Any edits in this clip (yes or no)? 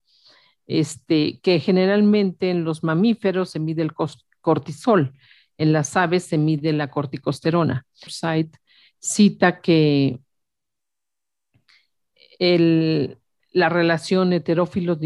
yes